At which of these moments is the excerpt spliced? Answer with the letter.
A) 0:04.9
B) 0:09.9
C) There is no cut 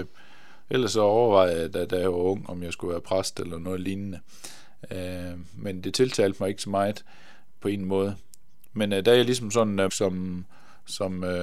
B